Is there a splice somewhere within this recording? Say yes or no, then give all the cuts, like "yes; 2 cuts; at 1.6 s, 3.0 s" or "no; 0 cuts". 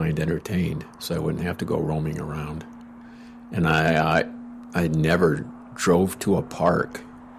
no; 0 cuts